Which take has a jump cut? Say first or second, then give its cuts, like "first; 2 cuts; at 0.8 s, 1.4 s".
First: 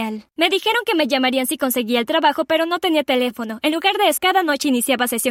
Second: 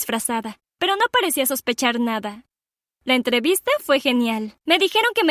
first; 1 cut; at 4.2 s